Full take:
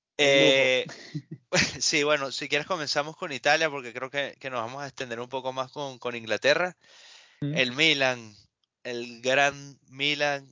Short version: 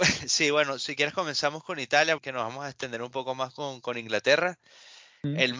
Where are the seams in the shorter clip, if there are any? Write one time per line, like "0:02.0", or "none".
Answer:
0:02.2